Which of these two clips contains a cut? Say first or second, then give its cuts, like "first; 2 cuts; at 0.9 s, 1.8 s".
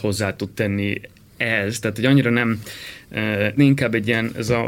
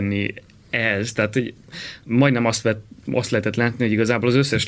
first; 2 cuts; at 1.8 s, 3.6 s